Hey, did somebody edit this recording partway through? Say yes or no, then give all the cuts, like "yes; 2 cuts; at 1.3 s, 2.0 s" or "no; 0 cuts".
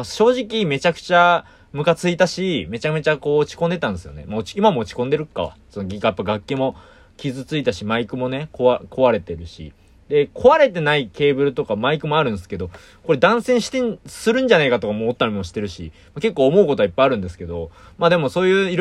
no; 0 cuts